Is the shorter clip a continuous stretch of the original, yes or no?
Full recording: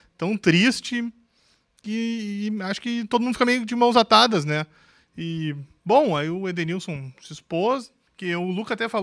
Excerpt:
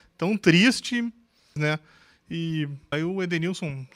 no